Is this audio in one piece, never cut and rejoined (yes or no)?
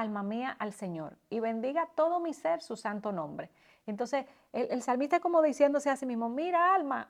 yes